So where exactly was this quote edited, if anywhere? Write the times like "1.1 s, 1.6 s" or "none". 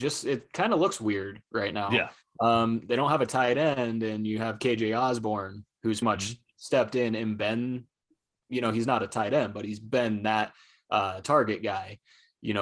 6.0 s